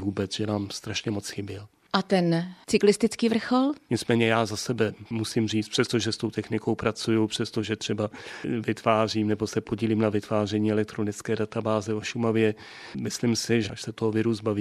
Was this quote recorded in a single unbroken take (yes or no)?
no